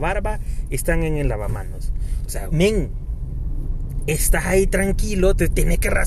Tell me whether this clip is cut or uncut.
cut